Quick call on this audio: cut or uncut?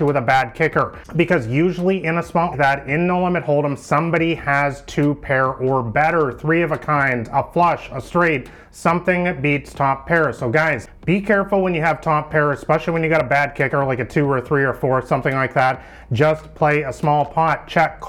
cut